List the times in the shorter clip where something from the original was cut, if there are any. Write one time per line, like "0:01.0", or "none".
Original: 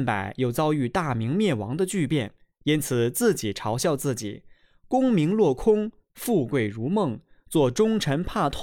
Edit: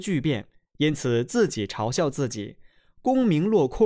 none